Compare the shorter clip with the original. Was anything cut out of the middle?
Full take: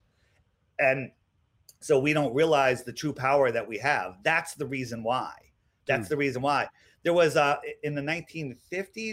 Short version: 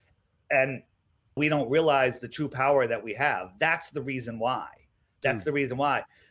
yes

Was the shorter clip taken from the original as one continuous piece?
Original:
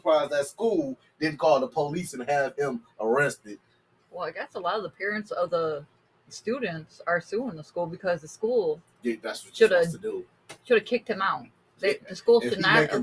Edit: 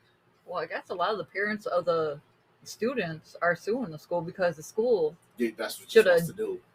yes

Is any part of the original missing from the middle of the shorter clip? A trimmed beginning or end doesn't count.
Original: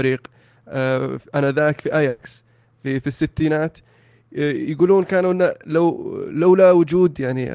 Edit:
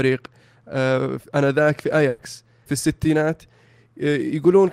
yes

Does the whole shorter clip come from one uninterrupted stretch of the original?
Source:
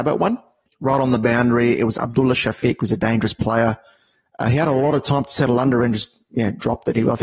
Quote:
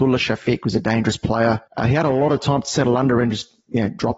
no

